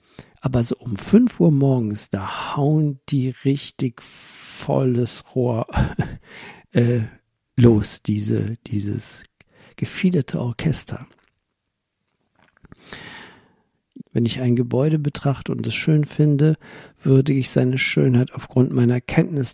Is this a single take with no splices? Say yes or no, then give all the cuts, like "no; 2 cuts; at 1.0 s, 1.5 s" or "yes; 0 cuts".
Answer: no; 1 cut; at 14.0 s